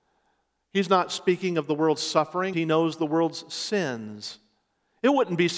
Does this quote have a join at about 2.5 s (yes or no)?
yes